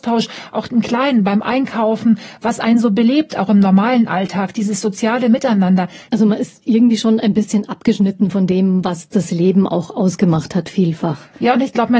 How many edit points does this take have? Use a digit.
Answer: 1